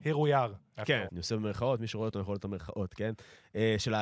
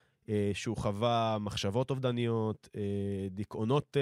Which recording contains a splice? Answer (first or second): first